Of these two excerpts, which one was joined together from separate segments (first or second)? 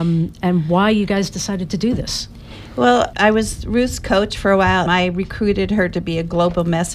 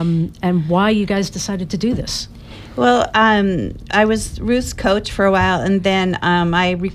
first